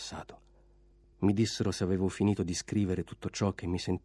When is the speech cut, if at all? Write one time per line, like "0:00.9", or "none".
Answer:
0:01.1

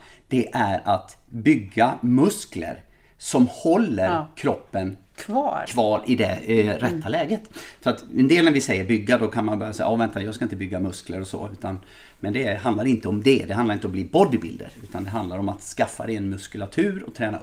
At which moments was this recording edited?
none

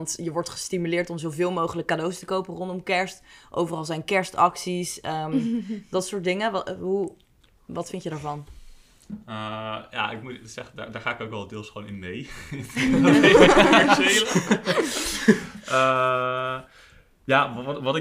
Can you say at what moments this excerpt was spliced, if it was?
none

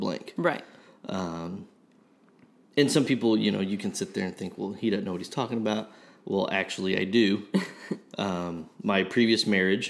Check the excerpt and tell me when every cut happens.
none

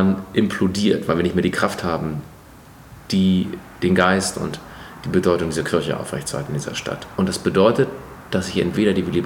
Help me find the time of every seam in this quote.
0:07.2

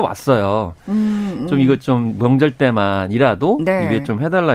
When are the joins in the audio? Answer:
none

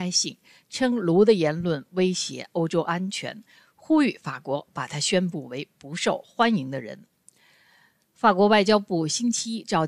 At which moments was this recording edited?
none

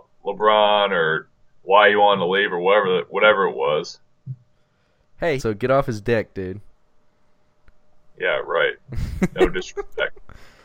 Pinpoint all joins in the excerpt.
0:05.4

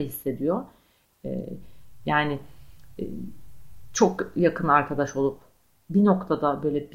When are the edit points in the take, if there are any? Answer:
0:01.0

